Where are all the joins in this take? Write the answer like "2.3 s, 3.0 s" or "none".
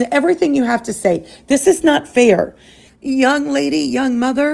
2.9 s